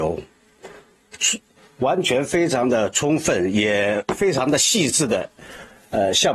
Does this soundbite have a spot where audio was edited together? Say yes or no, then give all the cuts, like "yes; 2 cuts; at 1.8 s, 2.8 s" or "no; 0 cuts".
no; 0 cuts